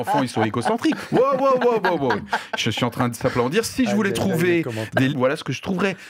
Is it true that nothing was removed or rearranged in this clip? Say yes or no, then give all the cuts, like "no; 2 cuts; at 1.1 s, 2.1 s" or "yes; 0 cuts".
no; 1 cut; at 5.1 s